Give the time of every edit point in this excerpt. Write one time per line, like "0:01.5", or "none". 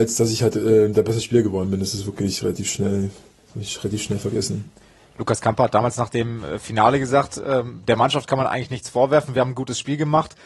none